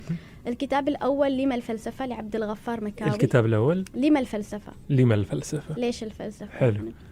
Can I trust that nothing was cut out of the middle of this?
yes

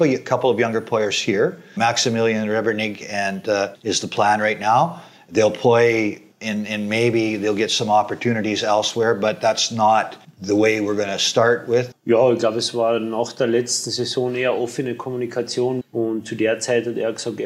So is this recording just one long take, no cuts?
no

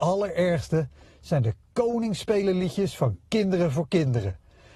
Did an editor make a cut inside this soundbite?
no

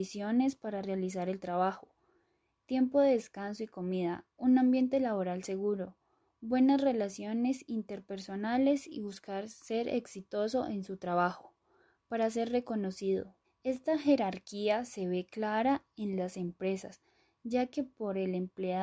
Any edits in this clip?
yes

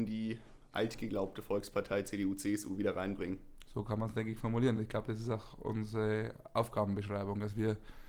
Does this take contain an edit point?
no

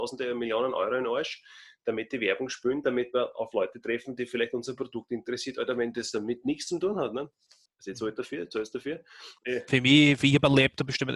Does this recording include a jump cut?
yes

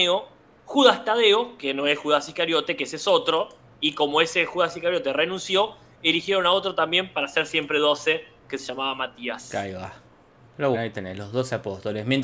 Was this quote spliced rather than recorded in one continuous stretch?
yes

